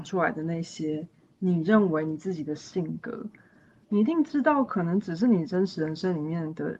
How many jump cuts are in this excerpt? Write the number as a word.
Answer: zero